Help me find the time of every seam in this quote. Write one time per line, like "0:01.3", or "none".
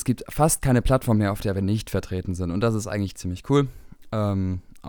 none